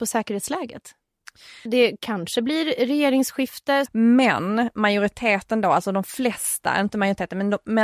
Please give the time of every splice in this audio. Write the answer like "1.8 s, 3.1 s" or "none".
1.7 s, 3.9 s